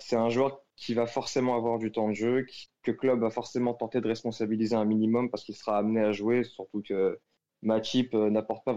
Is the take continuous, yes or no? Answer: yes